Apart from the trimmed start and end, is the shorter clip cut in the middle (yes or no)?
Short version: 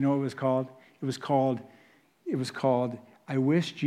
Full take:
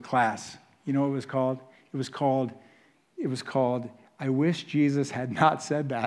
no